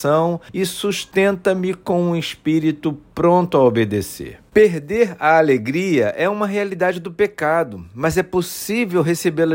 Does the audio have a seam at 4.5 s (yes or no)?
yes